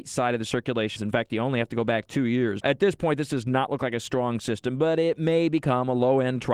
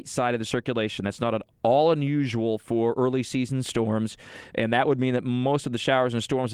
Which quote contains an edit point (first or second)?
first